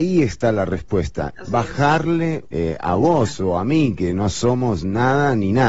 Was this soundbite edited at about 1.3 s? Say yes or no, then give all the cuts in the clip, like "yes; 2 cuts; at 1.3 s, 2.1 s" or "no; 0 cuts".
yes; 2 cuts; at 1.3 s, 2.5 s